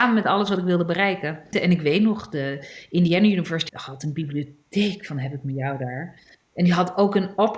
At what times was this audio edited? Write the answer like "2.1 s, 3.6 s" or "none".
1.5 s, 3.7 s